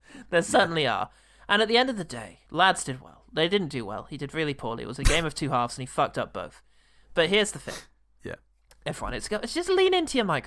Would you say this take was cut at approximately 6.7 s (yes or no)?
no